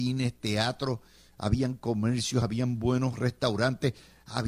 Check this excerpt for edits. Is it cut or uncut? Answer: uncut